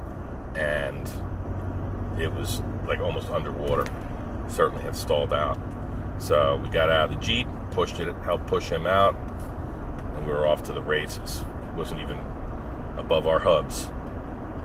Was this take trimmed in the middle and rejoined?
no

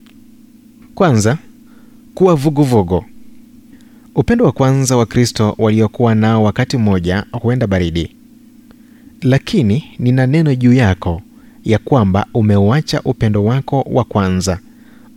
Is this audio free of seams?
yes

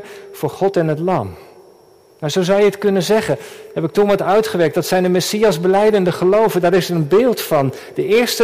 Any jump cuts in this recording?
no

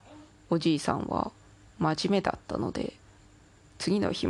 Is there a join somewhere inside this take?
no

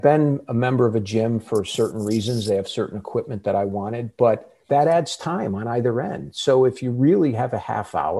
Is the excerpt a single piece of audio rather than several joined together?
no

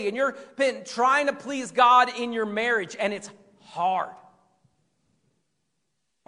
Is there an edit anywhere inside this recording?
no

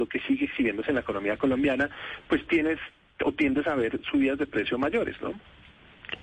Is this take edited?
no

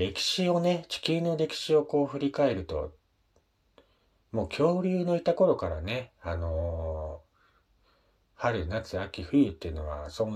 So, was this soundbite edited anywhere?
no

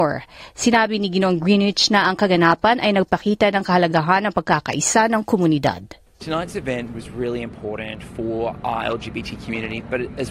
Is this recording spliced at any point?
yes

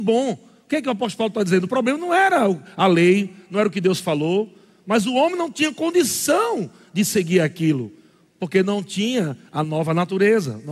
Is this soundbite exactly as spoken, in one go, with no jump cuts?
yes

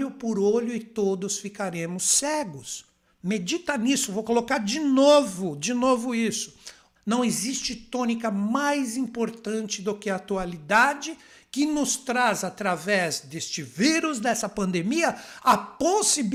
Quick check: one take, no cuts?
no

